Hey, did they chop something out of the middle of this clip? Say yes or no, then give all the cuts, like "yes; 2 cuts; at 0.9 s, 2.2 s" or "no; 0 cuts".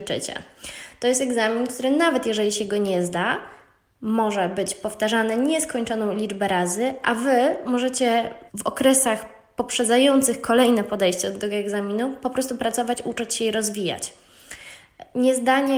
yes; 1 cut; at 8.5 s